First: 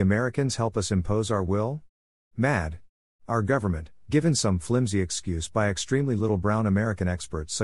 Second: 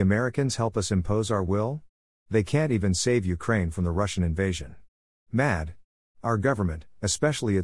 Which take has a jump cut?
first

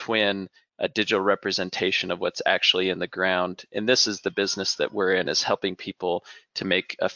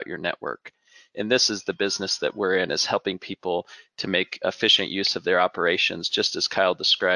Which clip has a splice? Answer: second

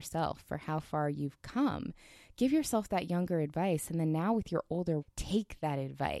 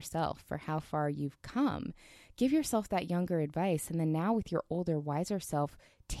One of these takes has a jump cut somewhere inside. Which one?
first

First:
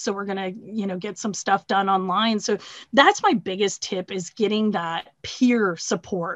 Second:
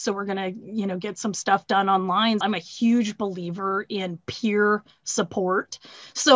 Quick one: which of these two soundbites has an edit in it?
second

